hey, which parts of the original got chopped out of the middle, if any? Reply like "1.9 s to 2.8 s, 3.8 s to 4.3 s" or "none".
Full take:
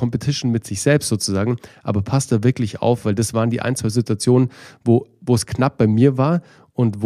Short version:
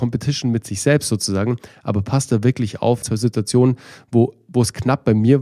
3.0 s to 3.7 s